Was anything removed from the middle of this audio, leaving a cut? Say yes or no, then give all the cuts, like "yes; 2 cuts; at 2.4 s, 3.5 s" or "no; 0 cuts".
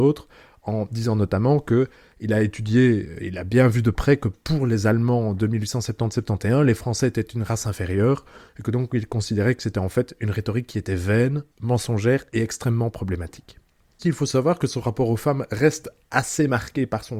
yes; 2 cuts; at 11.5 s, 14.0 s